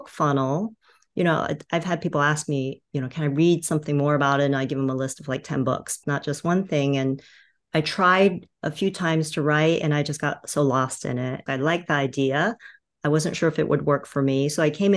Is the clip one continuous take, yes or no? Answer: no